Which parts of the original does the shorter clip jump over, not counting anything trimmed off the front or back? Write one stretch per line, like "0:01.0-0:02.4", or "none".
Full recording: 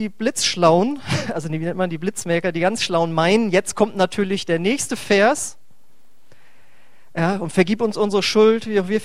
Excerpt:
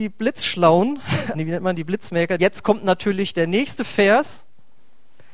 0:01.3-0:01.5
0:02.5-0:03.5